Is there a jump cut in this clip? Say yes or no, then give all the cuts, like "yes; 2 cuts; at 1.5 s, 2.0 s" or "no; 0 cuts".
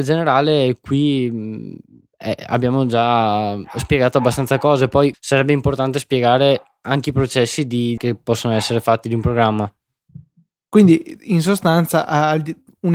yes; 2 cuts; at 5.1 s, 8.0 s